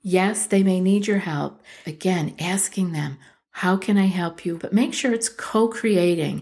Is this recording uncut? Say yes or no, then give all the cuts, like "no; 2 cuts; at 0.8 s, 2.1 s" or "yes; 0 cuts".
no; 2 cuts; at 1.8 s, 4.6 s